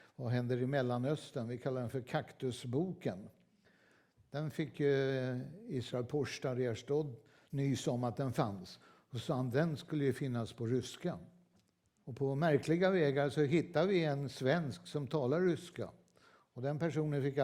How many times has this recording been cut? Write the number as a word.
one